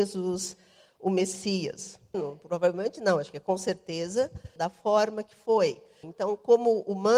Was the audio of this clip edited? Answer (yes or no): yes